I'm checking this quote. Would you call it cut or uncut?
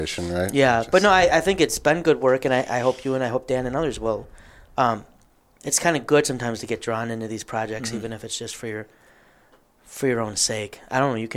uncut